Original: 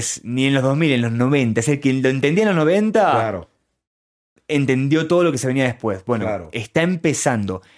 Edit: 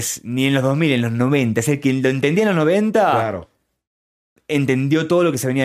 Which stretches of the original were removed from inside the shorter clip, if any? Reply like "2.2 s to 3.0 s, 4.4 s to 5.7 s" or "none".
none